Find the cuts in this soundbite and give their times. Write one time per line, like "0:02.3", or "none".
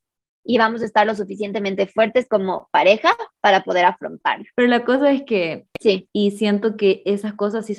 0:04.5
0:06.1